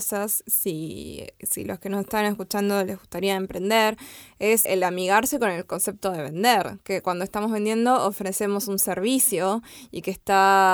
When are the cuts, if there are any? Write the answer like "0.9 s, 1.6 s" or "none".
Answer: 4.7 s